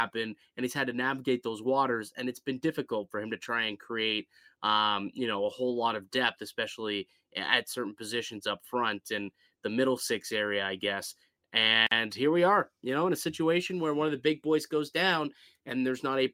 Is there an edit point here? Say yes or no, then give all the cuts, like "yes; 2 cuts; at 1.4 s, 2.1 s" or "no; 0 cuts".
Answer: no; 0 cuts